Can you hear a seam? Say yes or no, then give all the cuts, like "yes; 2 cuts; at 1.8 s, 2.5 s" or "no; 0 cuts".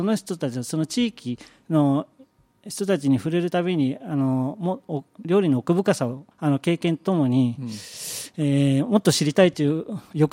yes; 1 cut; at 6.3 s